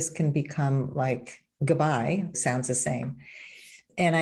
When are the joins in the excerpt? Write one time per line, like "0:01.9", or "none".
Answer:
0:02.3

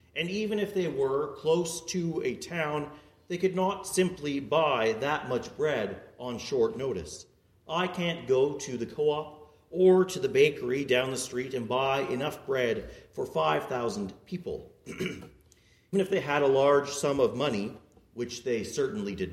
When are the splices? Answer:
0:15.9

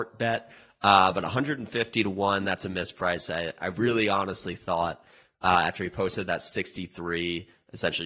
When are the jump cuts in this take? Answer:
none

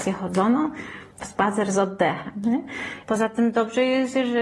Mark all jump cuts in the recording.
0:01.2
0:03.0

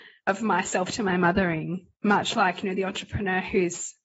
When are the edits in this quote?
0:01.9

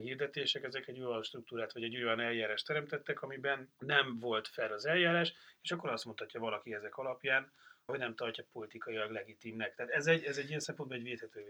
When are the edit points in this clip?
0:07.9

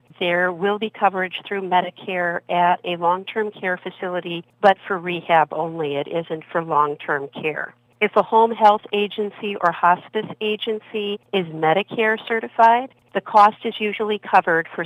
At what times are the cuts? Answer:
none

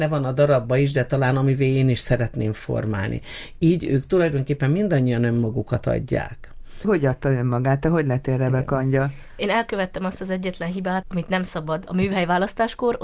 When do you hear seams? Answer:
0:06.8
0:11.0

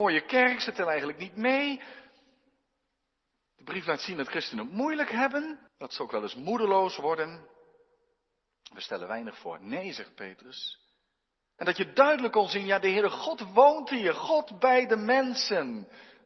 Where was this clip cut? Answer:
0:05.7
0:11.6

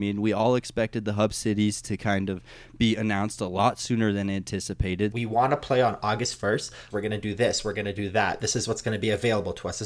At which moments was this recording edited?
0:05.1
0:06.9

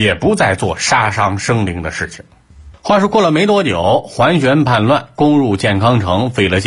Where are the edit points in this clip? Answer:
none

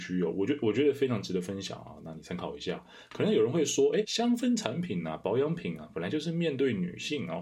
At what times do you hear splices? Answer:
0:04.0

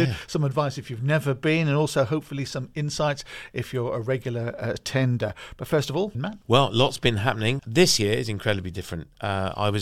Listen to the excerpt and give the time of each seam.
0:06.1
0:07.6

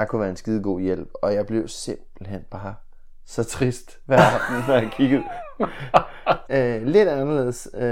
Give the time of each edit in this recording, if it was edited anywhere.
0:06.5

